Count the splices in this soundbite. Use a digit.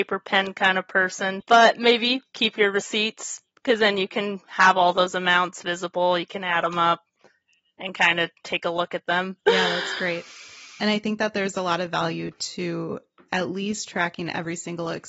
2